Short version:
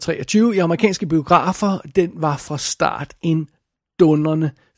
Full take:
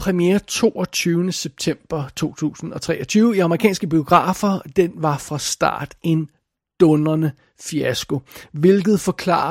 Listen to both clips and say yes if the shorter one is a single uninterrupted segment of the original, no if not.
yes